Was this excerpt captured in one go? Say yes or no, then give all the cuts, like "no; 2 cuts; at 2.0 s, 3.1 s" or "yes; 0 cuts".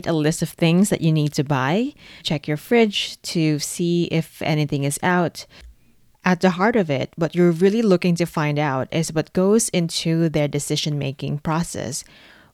no; 2 cuts; at 2.2 s, 6.1 s